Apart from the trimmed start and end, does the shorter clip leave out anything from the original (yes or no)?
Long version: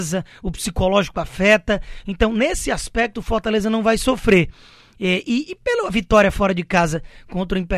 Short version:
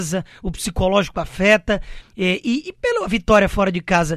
yes